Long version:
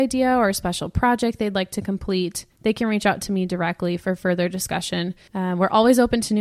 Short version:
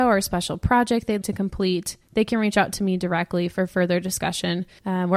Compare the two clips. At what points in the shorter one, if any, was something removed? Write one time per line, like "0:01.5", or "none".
0:01.2